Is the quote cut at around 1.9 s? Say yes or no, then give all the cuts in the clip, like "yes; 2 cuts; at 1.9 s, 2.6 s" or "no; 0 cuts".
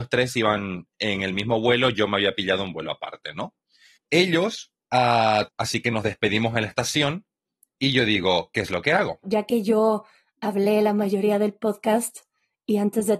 no; 2 cuts; at 5.5 s, 9.2 s